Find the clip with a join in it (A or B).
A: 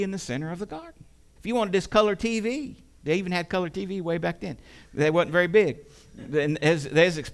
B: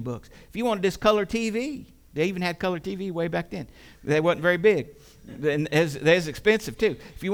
A